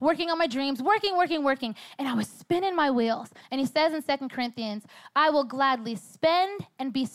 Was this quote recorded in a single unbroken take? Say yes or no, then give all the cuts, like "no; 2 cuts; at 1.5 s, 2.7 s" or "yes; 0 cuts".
no; 1 cut; at 3.4 s